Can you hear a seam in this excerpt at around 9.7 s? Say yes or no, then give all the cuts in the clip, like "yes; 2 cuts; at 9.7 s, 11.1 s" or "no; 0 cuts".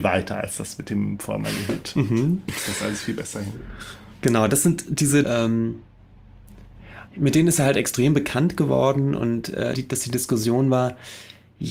yes; 3 cuts; at 5.2 s, 7.1 s, 9.7 s